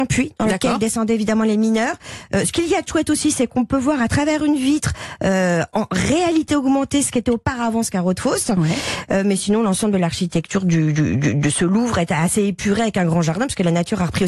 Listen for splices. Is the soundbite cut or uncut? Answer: uncut